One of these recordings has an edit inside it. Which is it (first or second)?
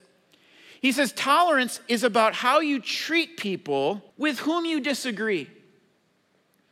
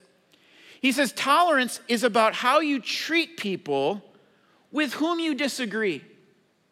first